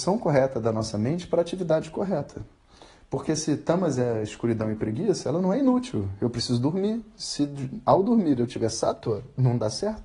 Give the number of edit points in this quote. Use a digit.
0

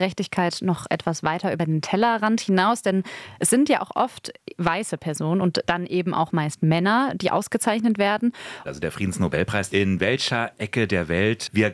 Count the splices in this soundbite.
2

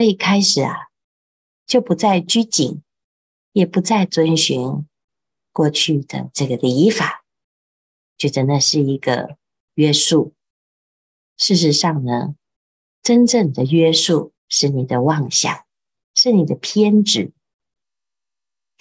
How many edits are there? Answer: 2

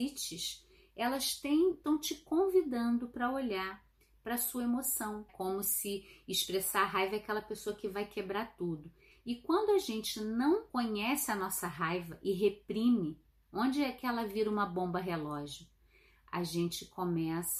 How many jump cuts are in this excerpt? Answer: 3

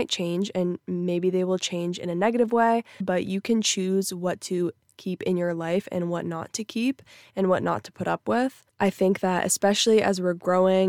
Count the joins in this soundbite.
2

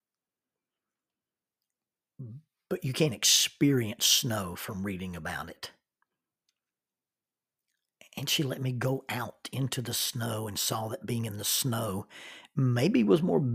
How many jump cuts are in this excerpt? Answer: 0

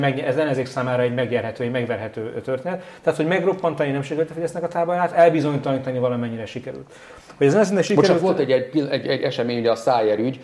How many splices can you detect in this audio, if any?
0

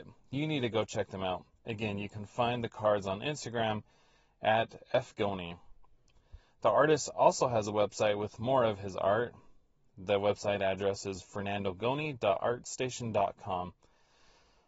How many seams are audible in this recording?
0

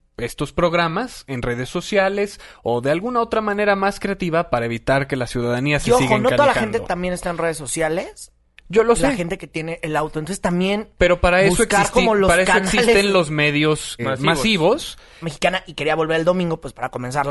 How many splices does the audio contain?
2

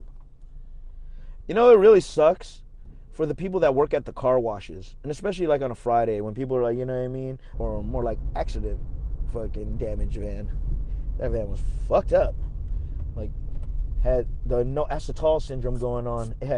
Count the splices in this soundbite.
2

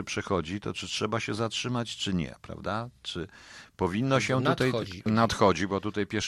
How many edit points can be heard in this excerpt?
1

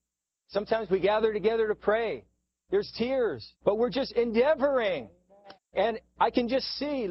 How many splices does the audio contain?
2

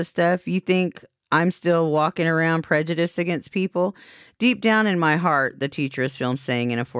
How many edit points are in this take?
0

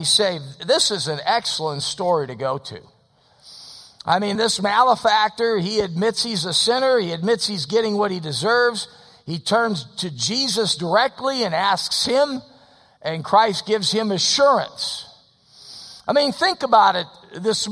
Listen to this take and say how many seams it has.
1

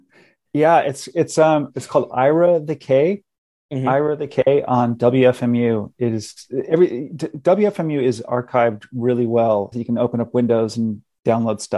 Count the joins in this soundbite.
2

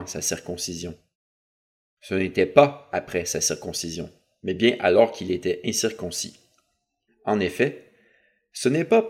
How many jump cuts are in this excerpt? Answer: 1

